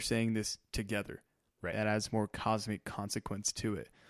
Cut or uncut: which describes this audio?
cut